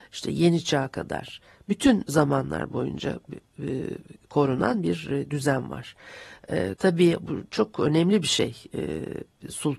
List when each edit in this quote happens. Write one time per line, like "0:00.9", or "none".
0:06.8